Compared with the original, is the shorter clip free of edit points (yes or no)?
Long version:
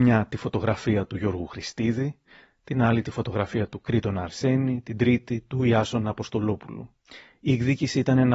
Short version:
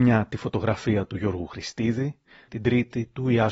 no